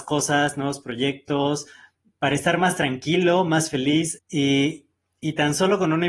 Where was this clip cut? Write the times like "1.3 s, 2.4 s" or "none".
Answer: 4.2 s